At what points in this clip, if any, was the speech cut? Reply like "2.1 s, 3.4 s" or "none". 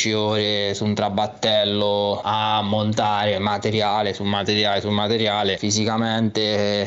none